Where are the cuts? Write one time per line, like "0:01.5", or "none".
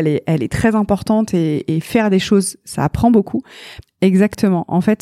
0:03.8